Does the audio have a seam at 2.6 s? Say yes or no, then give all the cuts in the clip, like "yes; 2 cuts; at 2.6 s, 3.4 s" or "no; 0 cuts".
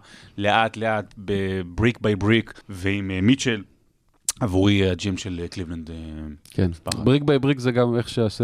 yes; 1 cut; at 2.6 s